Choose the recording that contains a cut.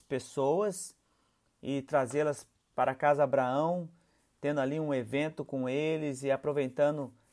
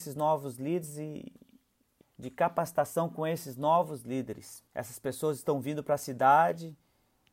second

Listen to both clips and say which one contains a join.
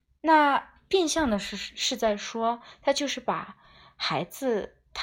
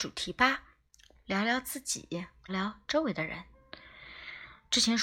second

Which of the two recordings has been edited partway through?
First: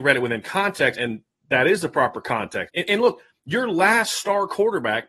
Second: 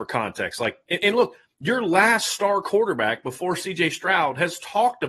first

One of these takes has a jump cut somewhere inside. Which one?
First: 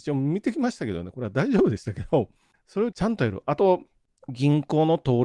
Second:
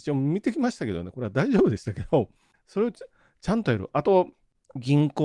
first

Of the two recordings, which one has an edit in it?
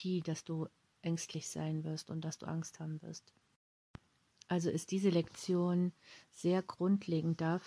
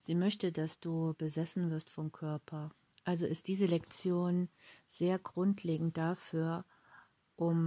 second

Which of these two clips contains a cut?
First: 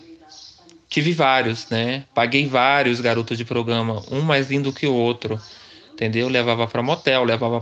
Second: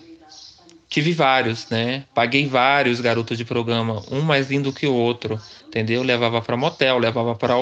second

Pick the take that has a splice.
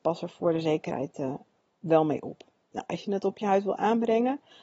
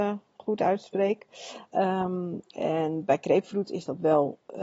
second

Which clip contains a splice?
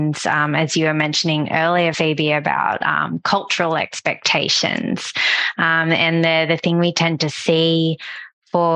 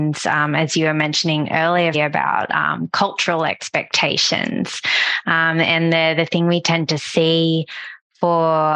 second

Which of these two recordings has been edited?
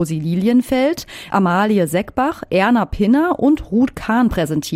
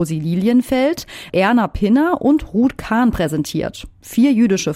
second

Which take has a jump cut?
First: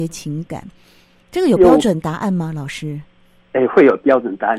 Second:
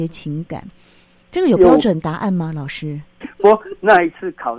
second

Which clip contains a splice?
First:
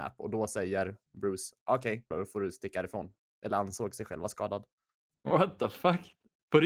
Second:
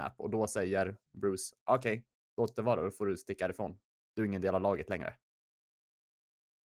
first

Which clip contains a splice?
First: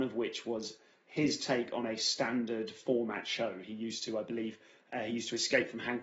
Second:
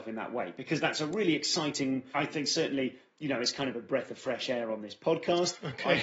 second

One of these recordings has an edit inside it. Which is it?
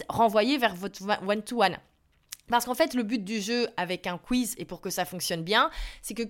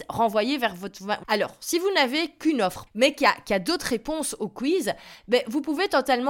second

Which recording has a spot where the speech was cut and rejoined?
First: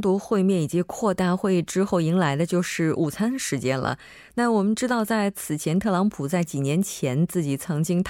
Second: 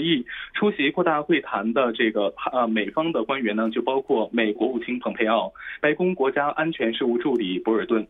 second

